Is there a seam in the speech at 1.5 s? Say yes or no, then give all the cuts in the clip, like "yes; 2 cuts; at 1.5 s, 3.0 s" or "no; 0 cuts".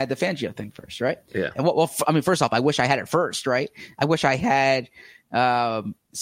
yes; 1 cut; at 1.5 s